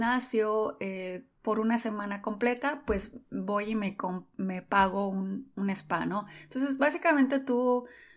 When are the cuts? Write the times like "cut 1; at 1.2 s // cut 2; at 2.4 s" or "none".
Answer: cut 1; at 1.4 s